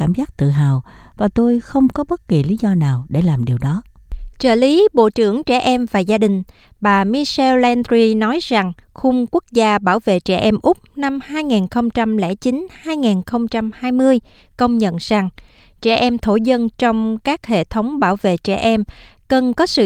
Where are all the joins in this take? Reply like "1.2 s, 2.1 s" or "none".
8.8 s